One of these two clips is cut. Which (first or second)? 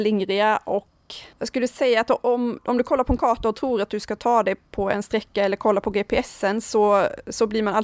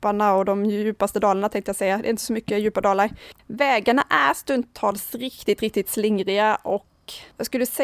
second